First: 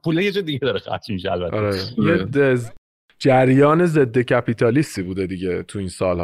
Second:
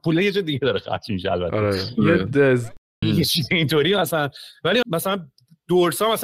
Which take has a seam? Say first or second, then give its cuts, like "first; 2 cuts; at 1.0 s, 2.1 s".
second; 2 cuts; at 3.0 s, 4.8 s